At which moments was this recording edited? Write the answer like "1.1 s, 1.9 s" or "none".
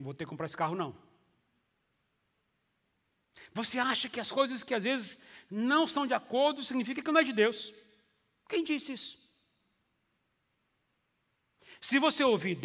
none